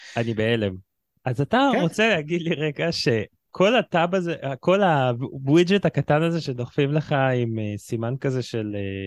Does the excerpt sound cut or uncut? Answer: uncut